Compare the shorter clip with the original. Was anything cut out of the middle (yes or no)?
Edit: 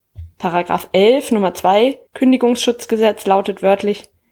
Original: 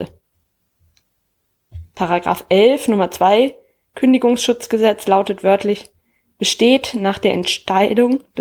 yes